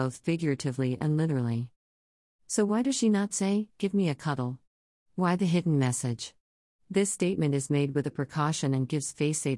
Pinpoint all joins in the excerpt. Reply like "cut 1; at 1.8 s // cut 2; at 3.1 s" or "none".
none